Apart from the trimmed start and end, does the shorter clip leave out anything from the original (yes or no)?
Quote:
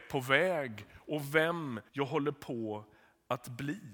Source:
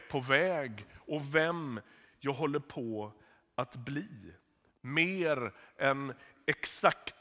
yes